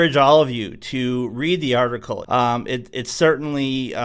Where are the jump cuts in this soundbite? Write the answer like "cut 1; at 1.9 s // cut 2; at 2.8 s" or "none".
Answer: cut 1; at 2.2 s

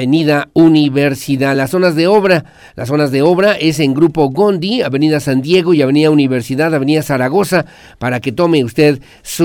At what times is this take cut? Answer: none

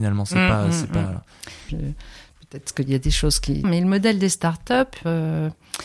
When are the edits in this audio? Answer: cut 1; at 1.7 s // cut 2; at 3.6 s

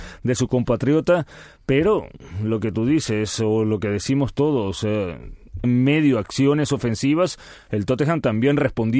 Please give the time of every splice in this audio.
cut 1; at 5.6 s

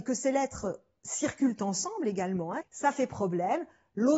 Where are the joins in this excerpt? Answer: cut 1; at 2.6 s

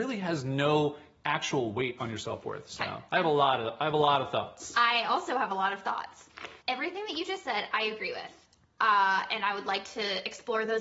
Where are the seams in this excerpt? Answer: cut 1; at 6.6 s

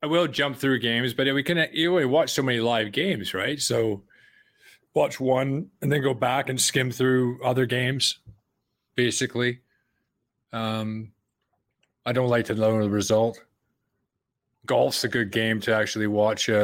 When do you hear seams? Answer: none

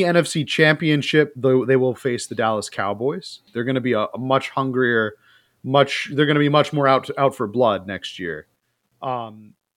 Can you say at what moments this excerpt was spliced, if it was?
cut 1; at 3.5 s

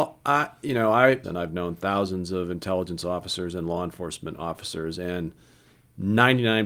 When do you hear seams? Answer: cut 1; at 1.2 s

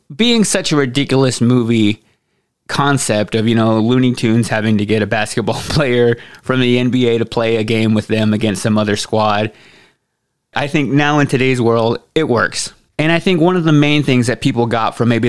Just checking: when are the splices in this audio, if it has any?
cut 1; at 10.5 s // cut 2; at 12.9 s

